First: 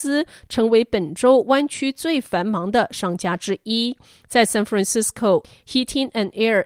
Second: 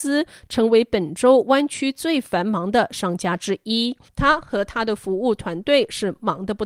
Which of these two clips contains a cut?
second; 1 cut; at 4.1 s

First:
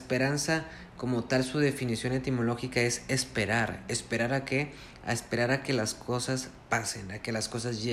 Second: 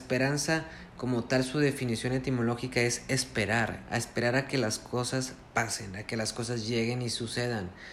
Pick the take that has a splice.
second; 1 cut; at 3.8 s

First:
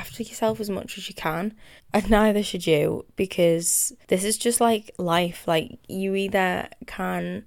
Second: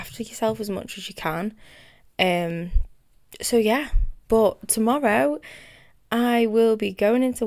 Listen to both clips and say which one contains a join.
first; 2 cuts; at 1.8 s, 4.0 s

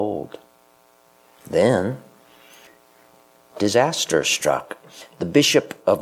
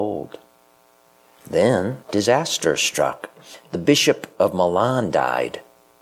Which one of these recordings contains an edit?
second; 1 cut; at 2.0 s

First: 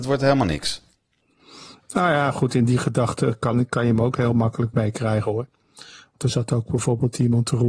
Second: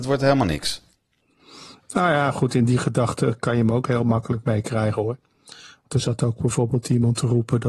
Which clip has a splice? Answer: second; 1 cut; at 3.4 s

